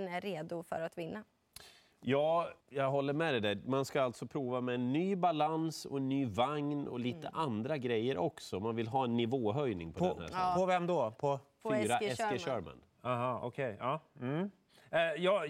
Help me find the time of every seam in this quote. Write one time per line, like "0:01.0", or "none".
0:02.6

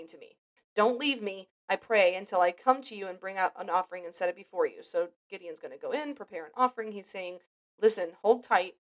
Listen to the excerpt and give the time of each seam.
none

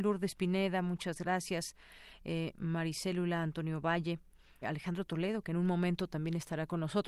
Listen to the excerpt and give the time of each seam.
0:04.6

